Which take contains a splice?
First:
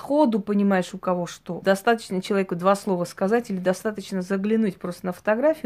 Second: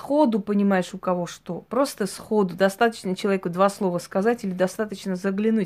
first; 1 cut; at 1.6 s

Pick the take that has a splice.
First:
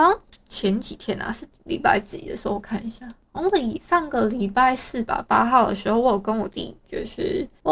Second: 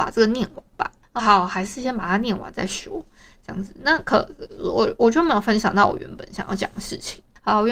second; 1 cut; at 1.2 s

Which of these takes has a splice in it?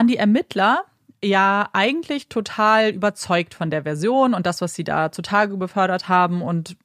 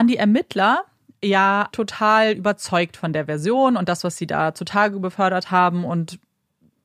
second; 1 cut; at 1.7 s

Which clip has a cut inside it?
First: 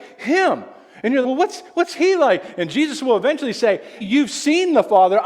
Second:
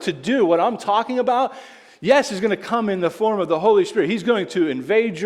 first; 2 cuts; at 1.2 s, 4.0 s

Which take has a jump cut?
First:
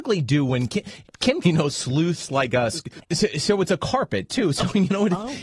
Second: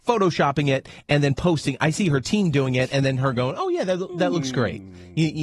first; 2 cuts; at 1.4 s, 3.0 s

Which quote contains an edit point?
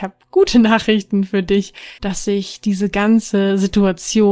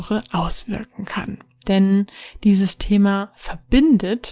first; 1 cut; at 2.0 s

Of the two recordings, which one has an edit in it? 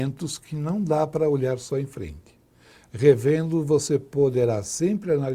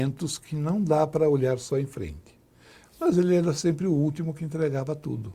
second; 1 cut; at 2.9 s

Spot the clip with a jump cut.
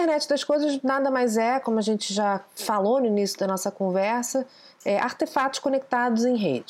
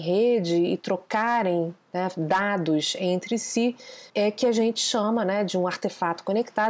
second; 1 cut; at 4.1 s

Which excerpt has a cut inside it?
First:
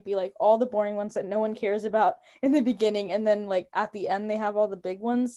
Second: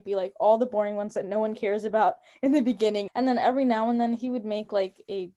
second; 1 cut; at 3.1 s

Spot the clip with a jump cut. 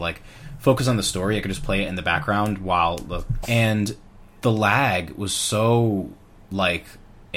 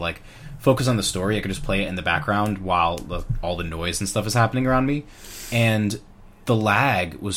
first; 1 cut; at 3.4 s

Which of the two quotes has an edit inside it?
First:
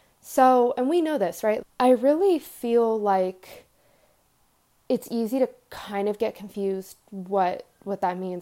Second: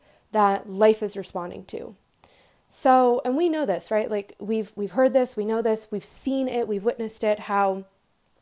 first; 1 cut; at 1.6 s

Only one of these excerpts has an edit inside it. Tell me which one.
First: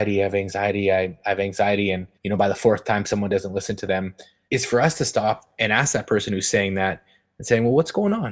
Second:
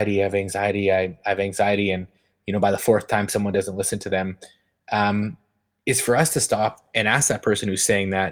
first; 2 cuts; at 2.2 s, 4.5 s

